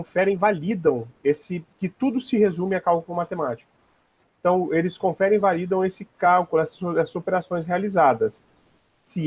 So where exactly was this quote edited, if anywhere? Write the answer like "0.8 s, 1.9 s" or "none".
none